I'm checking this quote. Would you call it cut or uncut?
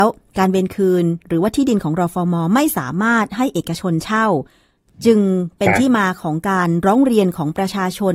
uncut